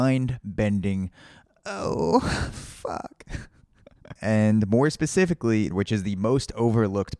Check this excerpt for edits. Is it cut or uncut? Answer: cut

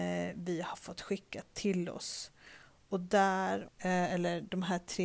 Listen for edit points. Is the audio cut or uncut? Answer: cut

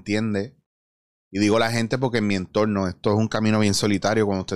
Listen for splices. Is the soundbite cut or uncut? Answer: uncut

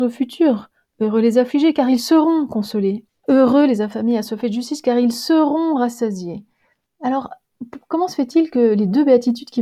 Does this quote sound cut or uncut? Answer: cut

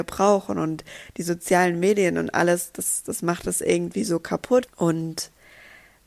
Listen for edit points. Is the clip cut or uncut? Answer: cut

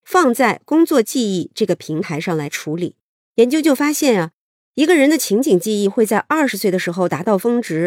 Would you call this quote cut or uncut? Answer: cut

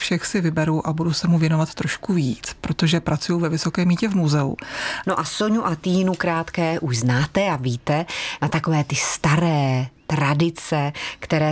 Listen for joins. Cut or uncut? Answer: cut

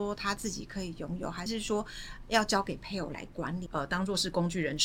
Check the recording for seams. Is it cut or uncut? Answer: cut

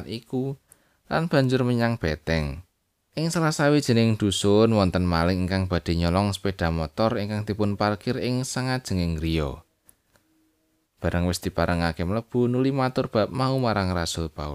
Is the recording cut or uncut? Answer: cut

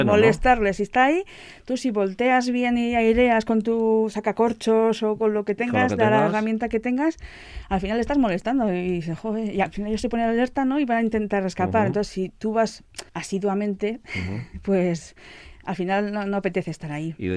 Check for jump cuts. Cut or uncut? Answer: cut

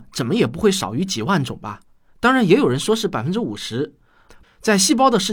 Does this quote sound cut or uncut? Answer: cut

